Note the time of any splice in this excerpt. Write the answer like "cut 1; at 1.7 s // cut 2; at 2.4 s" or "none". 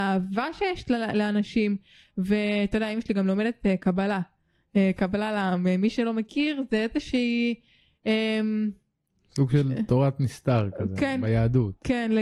none